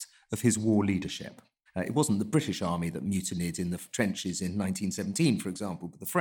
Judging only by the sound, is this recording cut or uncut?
cut